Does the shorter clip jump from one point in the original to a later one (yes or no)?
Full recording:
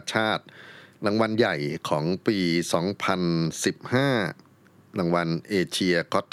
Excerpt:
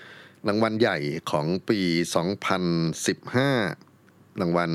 no